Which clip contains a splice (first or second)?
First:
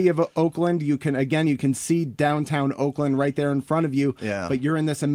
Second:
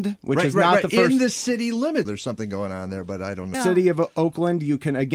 second